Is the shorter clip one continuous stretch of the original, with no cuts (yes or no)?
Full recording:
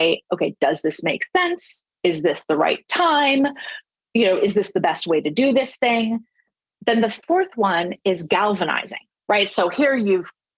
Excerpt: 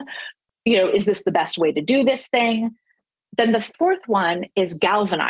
yes